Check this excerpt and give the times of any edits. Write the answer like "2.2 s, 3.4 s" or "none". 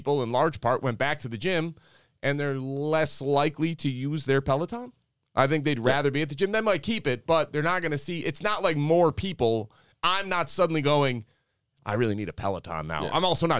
none